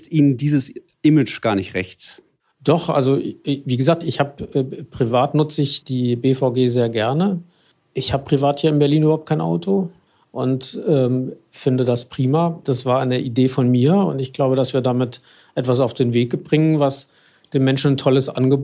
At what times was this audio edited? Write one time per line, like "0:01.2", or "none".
0:05.8
0:12.6